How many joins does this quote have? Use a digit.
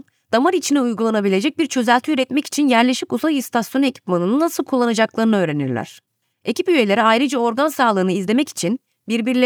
0